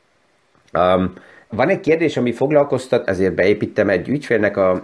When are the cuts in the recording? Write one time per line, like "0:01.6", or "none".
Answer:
0:01.5
0:03.0